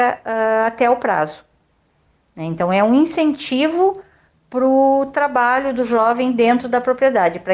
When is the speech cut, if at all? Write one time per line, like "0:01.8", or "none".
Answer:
none